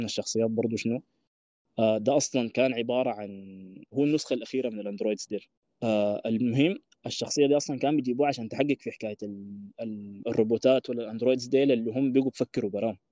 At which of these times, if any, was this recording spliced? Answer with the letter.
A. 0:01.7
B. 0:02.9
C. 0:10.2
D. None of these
C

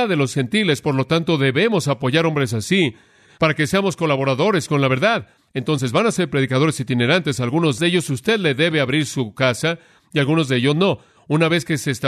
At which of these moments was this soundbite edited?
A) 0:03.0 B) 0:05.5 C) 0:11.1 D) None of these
D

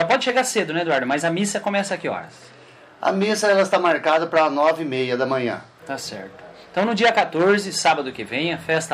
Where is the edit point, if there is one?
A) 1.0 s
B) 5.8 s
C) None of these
B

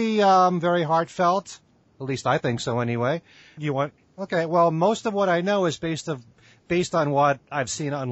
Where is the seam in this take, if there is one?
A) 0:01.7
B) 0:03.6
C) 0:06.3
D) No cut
B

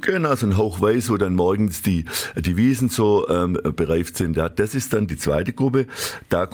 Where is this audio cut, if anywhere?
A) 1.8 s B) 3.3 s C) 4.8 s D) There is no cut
D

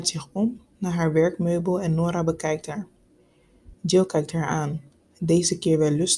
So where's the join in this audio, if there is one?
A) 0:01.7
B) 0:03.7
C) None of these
B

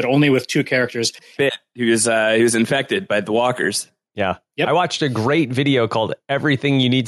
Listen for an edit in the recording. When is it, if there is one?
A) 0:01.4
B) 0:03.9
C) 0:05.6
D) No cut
A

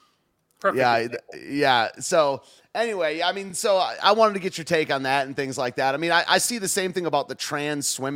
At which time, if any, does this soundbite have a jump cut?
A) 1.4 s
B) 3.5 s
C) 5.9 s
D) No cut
D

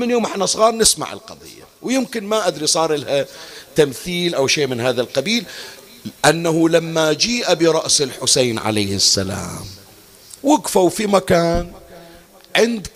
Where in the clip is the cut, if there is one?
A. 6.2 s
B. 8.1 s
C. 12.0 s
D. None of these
A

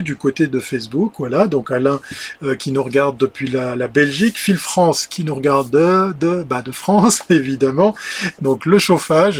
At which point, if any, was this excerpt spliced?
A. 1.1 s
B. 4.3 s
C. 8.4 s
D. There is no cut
C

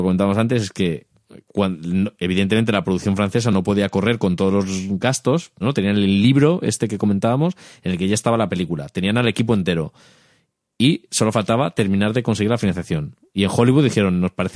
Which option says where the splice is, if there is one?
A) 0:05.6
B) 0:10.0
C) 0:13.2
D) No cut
A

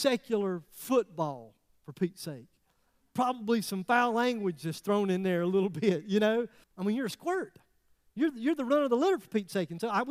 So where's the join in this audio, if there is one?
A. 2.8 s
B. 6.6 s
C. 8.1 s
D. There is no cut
B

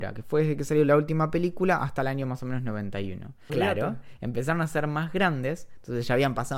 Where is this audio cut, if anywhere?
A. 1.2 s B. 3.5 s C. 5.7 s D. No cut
B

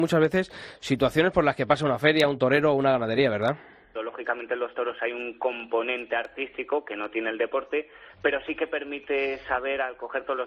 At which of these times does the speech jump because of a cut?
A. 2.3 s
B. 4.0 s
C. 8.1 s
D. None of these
B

